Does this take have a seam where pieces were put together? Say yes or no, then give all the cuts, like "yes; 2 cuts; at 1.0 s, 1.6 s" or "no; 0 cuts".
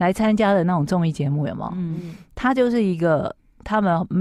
no; 0 cuts